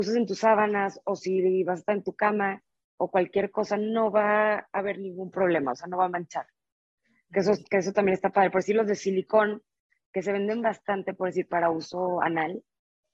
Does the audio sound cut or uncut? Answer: uncut